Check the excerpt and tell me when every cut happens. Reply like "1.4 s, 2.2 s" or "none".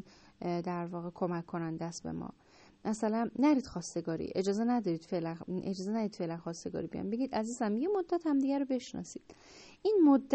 none